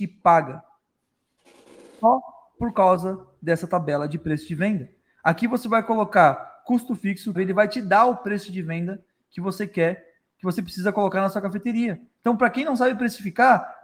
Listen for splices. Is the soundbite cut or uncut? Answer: cut